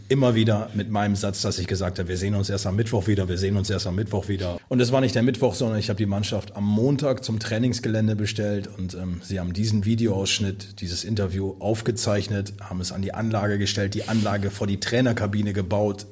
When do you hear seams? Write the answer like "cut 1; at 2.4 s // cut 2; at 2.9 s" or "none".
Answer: cut 1; at 4.6 s